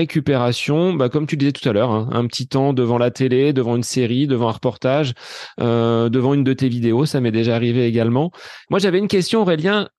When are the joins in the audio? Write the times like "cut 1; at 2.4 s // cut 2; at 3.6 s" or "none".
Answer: cut 1; at 8.7 s